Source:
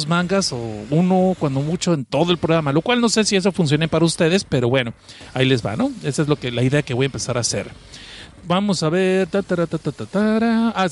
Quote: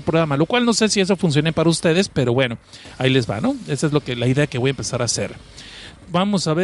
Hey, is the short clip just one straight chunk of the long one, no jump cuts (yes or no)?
yes